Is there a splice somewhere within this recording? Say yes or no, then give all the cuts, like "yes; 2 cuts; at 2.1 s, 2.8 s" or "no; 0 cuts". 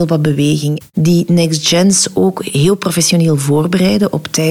yes; 1 cut; at 0.9 s